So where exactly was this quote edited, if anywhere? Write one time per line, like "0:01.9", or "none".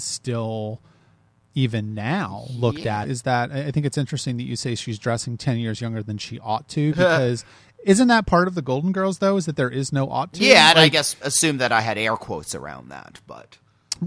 0:03.0
0:11.2